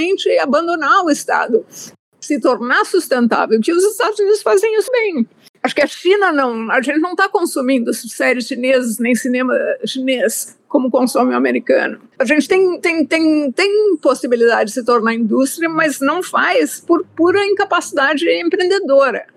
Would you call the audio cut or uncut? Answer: cut